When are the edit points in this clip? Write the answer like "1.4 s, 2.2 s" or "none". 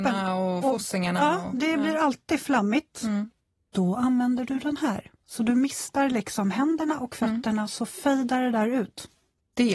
none